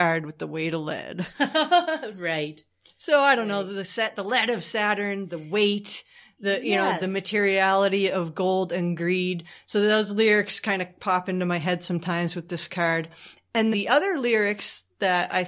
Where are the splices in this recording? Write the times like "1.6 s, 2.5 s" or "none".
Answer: 13.7 s

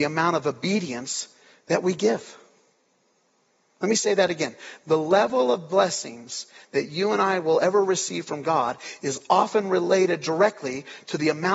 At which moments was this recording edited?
none

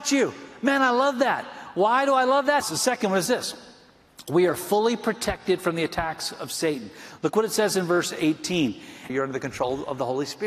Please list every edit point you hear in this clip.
2.6 s, 9.1 s

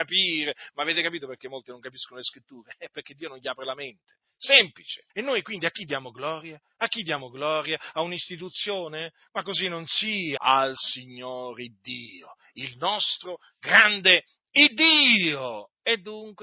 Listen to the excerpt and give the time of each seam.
5.1 s, 10.4 s

